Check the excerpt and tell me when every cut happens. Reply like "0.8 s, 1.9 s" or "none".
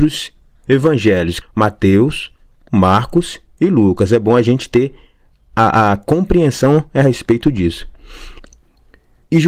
1.4 s